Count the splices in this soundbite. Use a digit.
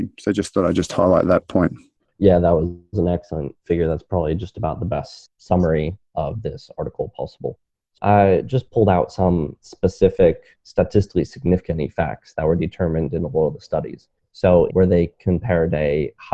2